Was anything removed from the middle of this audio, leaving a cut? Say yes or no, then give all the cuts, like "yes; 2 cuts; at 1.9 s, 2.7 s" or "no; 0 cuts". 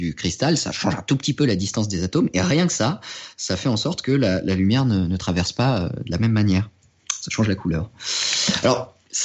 no; 0 cuts